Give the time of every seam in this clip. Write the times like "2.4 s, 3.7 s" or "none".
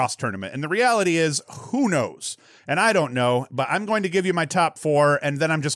none